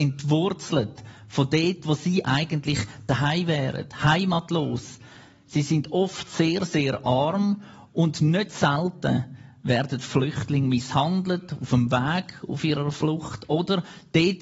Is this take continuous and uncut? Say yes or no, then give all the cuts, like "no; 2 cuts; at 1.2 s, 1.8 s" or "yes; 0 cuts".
yes; 0 cuts